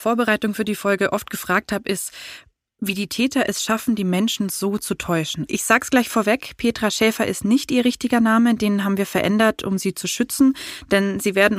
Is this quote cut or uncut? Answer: cut